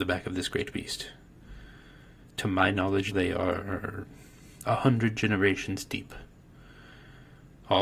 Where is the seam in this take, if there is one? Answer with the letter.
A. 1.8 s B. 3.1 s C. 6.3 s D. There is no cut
B